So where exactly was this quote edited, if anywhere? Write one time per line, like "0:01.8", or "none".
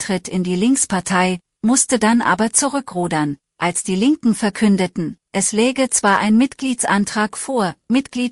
none